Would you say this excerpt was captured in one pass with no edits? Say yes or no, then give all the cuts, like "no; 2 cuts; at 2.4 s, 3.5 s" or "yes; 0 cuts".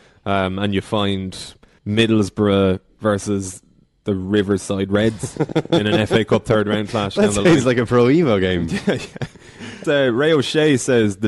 no; 2 cuts; at 1.8 s, 9.8 s